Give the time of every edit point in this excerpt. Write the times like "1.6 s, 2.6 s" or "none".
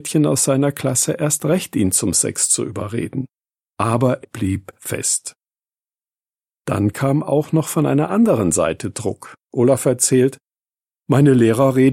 4.2 s